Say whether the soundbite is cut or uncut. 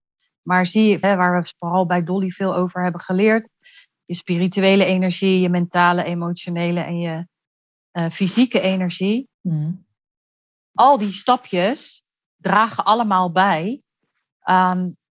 cut